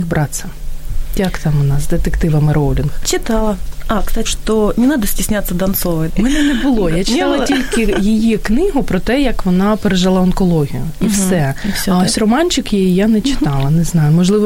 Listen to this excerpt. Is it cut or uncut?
cut